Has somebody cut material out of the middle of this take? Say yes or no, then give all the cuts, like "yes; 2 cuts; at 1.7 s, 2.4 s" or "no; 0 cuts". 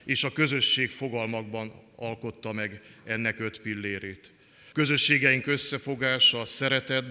yes; 1 cut; at 4.7 s